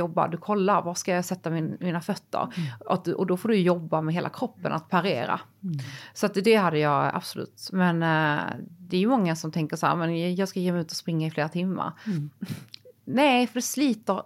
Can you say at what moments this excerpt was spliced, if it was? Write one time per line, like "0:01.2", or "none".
none